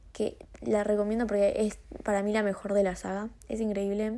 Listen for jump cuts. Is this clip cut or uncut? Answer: uncut